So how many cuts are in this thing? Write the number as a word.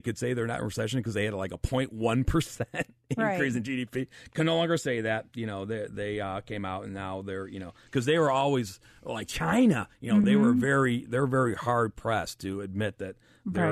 zero